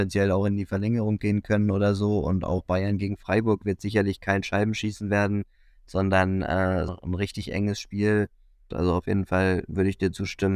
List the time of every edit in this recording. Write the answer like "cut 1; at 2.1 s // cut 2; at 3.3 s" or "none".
cut 1; at 6.9 s // cut 2; at 8.7 s